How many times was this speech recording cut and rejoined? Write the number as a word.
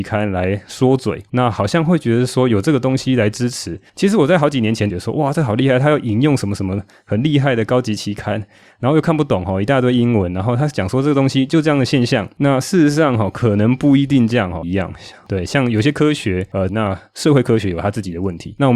three